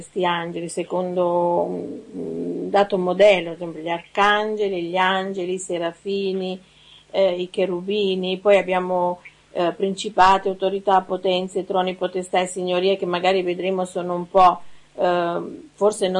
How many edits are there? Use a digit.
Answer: 0